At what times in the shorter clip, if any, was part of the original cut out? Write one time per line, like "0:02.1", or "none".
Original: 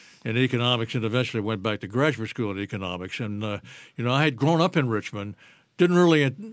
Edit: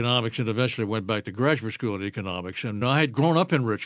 0:02.8